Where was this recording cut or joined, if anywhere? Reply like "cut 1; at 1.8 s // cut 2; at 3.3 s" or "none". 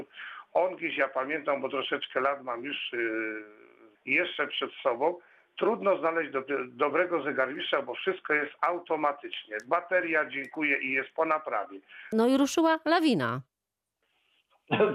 cut 1; at 4.0 s // cut 2; at 12.1 s

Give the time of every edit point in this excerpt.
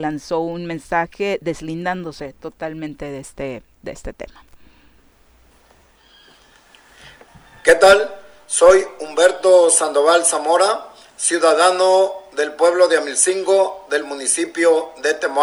none

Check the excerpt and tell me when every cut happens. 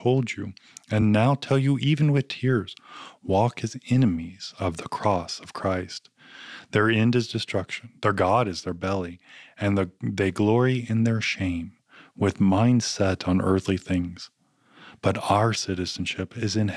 none

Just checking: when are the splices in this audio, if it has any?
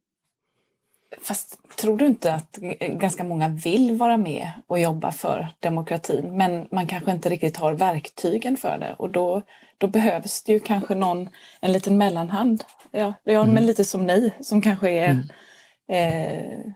none

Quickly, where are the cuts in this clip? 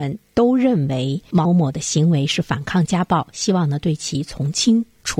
cut 1; at 1.5 s

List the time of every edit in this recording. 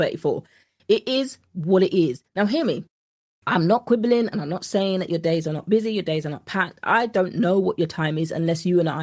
cut 1; at 2.2 s

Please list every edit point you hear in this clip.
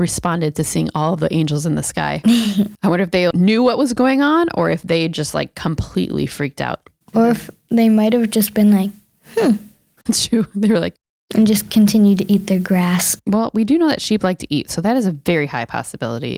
cut 1; at 3.3 s

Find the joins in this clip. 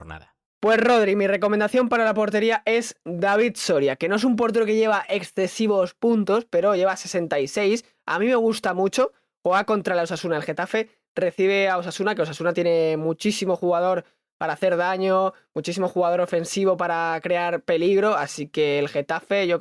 none

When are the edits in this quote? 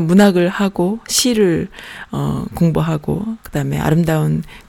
cut 1; at 3.4 s

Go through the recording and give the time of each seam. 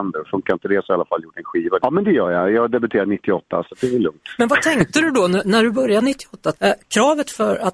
cut 1; at 1.8 s // cut 2; at 3.6 s // cut 3; at 6.5 s

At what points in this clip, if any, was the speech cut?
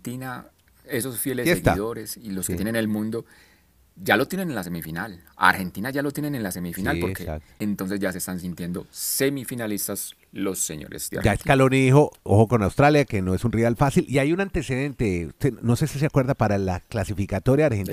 cut 1; at 7.6 s

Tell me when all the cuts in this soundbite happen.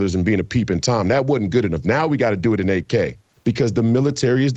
cut 1; at 3.4 s

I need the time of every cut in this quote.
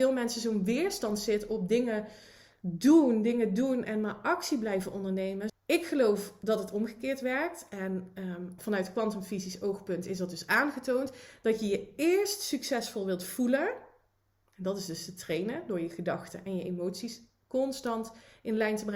cut 1; at 3.8 s // cut 2; at 5.5 s // cut 3; at 8.6 s

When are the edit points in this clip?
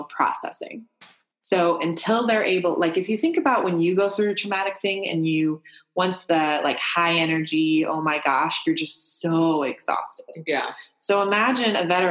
cut 1; at 8.6 s

